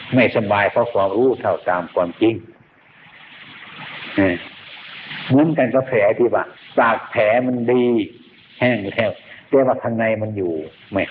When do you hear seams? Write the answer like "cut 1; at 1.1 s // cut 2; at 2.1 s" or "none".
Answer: none